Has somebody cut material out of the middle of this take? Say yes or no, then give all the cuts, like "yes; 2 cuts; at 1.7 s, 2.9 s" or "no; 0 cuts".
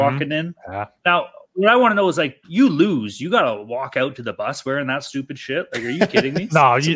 yes; 1 cut; at 2.4 s